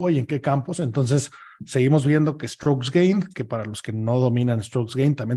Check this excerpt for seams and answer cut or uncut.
uncut